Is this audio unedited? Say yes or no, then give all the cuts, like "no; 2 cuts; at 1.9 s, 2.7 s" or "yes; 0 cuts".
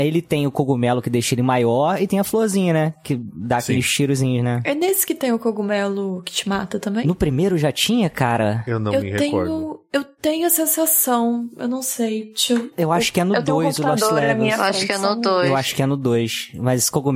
yes; 0 cuts